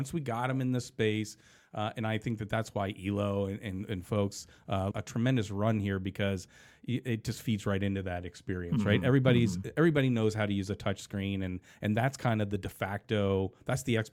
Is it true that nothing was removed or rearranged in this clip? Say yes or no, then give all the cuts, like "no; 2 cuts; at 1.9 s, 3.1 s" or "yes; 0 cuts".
no; 1 cut; at 4.9 s